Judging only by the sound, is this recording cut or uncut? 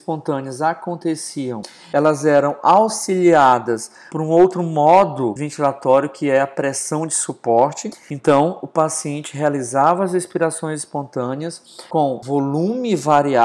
uncut